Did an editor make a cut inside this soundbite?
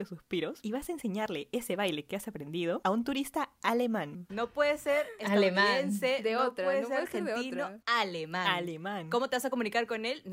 yes; 1 cut; at 4.3 s

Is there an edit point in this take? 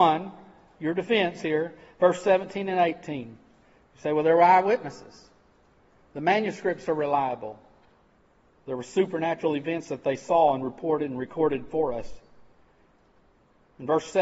no; 0 cuts

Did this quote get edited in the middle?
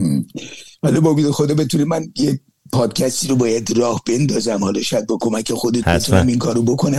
yes; 1 cut; at 5.8 s

